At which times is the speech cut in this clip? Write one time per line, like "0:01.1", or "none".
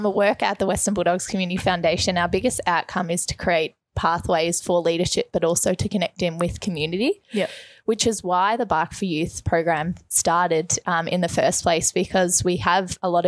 none